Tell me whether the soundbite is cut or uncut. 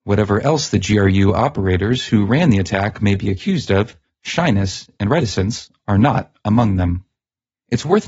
uncut